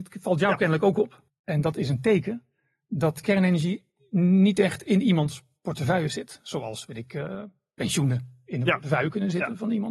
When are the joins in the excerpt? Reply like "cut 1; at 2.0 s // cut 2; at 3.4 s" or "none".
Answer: cut 1; at 1.3 s